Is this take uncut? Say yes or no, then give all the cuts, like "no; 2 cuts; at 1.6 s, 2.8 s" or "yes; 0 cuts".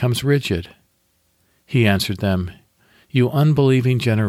no; 1 cut; at 1.5 s